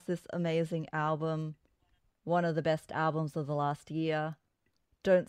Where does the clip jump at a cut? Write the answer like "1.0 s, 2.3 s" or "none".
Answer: none

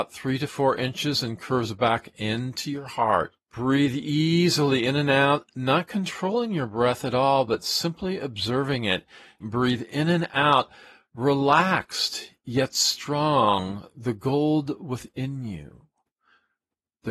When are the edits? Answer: 3.5 s, 9.4 s

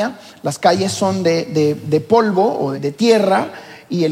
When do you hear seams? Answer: 2.7 s

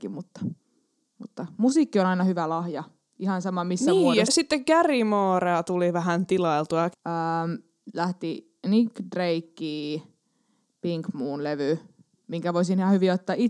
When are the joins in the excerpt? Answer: 4.2 s, 6.9 s

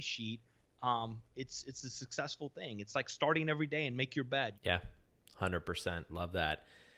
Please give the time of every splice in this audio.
4.5 s

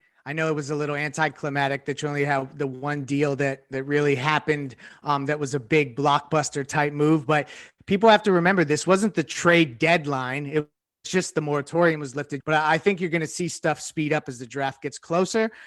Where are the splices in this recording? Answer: 12.4 s

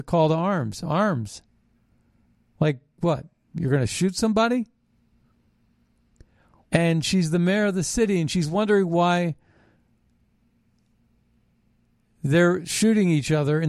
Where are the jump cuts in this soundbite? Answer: 6.6 s

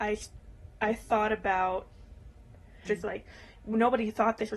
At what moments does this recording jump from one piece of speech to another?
2.8 s

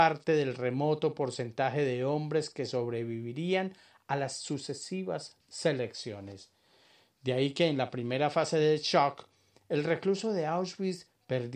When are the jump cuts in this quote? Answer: none

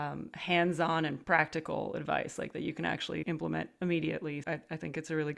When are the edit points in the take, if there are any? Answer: 1.2 s, 3.2 s, 4.4 s

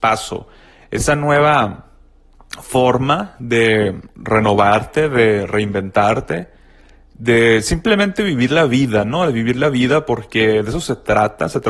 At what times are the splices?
none

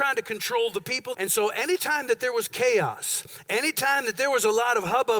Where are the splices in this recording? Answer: 1.1 s

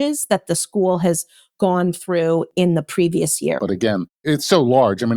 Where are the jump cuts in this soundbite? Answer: 3.6 s

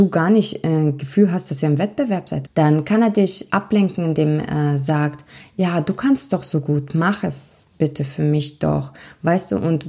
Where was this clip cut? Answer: 2.5 s

